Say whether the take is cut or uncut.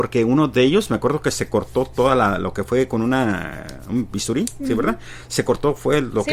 uncut